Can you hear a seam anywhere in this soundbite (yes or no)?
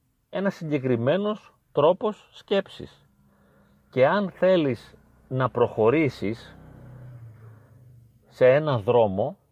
no